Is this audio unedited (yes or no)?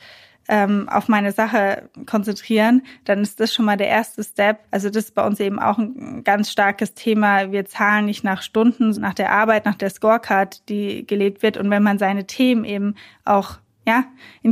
no